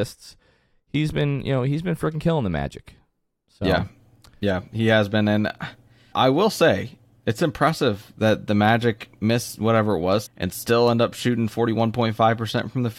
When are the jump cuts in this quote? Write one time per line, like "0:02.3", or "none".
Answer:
0:06.1
0:10.3